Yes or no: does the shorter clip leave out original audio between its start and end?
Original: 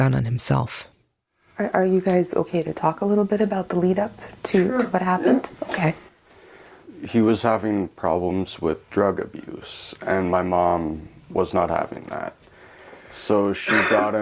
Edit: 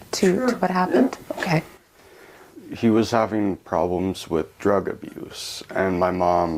no